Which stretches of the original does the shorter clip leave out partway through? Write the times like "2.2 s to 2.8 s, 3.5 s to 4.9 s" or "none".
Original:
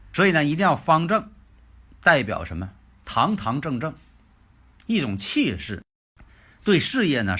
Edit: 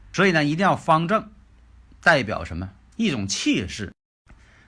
2.9 s to 4.8 s